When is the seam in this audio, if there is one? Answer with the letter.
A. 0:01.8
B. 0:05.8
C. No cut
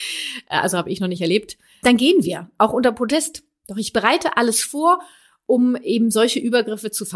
A